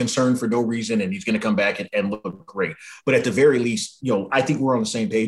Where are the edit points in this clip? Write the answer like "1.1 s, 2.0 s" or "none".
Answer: 4.3 s